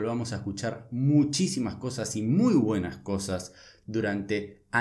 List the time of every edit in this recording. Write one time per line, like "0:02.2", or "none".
none